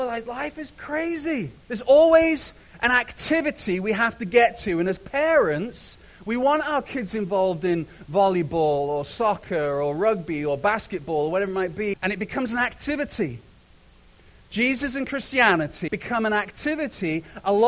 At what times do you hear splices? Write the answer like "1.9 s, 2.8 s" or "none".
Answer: 1.6 s, 11.9 s, 15.9 s